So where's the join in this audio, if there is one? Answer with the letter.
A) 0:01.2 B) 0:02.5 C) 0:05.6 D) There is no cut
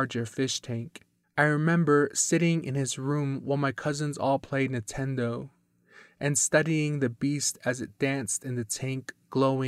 A